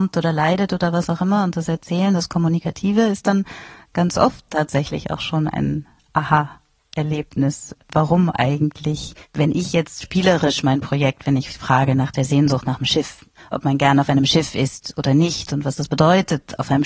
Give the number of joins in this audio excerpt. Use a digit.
1